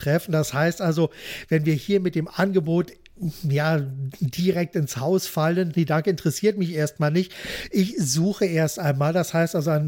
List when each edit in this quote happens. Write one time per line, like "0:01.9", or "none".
0:05.7